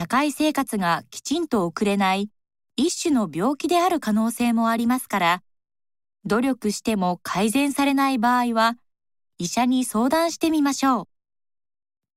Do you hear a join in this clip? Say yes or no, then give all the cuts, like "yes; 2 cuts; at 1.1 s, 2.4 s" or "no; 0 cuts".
no; 0 cuts